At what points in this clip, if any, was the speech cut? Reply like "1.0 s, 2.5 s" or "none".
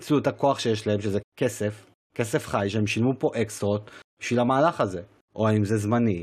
1.2 s, 5.3 s